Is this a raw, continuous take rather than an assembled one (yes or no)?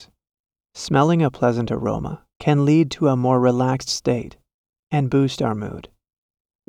no